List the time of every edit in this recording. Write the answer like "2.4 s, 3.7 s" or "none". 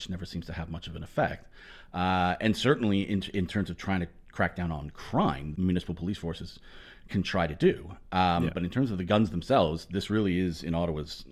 5.5 s